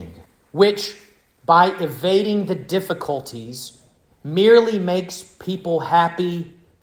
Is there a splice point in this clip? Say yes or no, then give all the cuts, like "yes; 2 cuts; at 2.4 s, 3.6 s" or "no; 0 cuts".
no; 0 cuts